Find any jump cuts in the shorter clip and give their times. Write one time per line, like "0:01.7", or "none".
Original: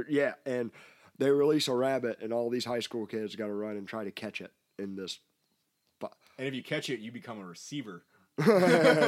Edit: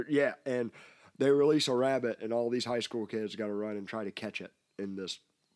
none